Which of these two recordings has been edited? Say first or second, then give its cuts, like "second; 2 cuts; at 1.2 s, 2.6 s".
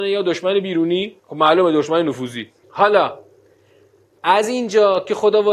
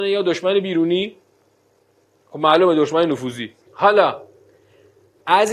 first; 1 cut; at 1.2 s